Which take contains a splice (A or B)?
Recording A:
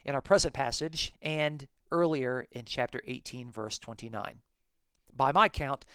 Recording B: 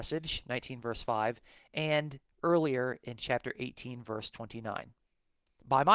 A